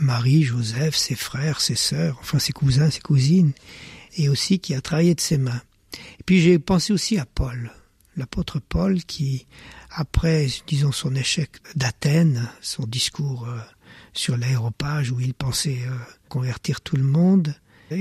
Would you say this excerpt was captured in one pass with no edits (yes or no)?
yes